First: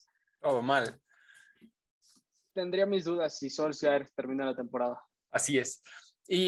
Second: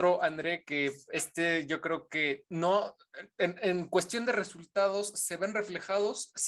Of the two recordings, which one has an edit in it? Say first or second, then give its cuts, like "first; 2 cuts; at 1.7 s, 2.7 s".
first; 2 cuts; at 2.5 s, 5.1 s